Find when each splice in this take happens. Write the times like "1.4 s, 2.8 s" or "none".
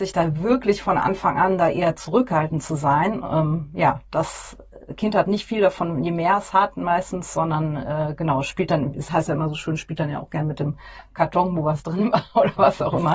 none